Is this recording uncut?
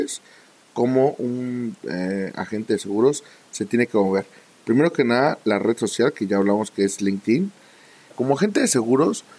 no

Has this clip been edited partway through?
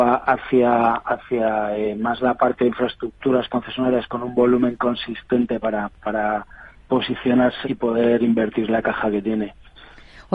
yes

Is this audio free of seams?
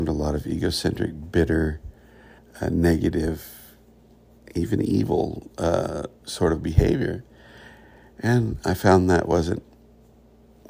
no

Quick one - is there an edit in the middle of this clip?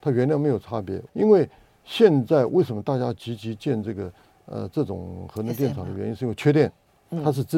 yes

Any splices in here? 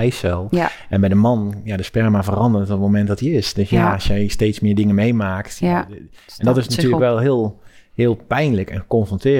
no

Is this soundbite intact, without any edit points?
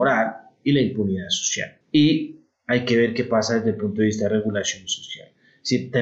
no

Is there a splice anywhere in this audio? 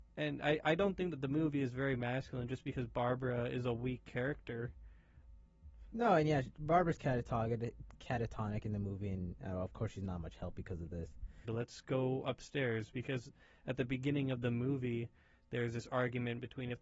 yes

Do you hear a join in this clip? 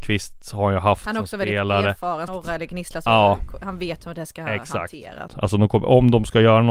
yes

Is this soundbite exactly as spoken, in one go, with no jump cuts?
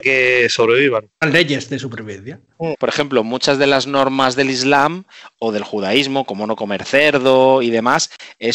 no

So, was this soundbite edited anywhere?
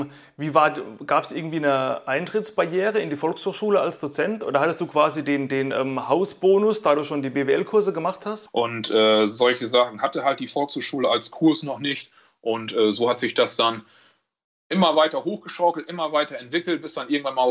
yes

